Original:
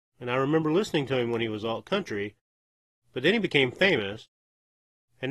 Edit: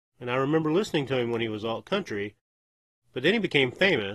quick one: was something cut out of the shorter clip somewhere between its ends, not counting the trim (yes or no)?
no